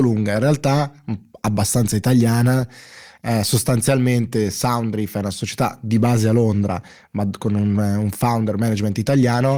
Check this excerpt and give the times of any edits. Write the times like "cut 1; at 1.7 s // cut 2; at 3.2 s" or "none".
none

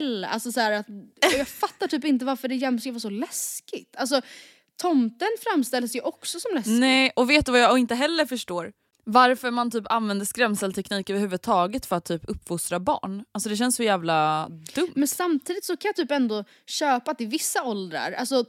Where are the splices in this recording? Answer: none

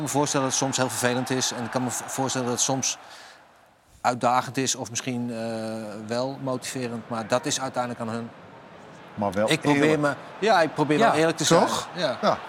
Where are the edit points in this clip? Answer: none

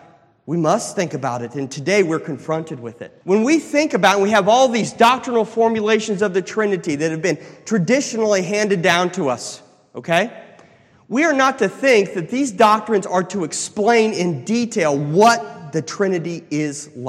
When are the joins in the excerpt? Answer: cut 1; at 3.2 s

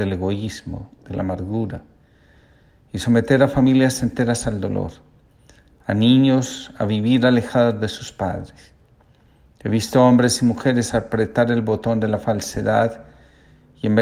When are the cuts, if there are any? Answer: cut 1; at 1.0 s

